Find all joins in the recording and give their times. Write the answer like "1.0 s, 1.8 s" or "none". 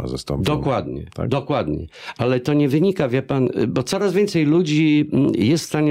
none